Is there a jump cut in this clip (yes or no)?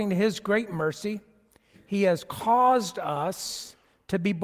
no